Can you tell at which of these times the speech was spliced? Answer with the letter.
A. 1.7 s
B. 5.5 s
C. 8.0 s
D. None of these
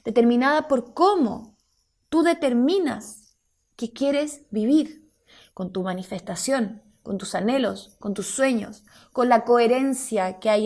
D